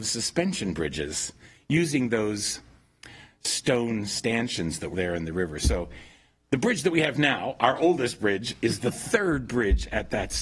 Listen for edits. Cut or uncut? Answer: cut